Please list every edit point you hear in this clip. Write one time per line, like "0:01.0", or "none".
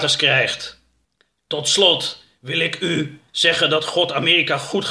0:03.3